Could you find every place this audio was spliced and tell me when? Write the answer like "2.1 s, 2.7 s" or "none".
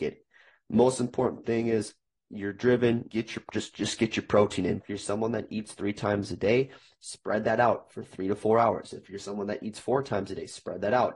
3.1 s, 4.8 s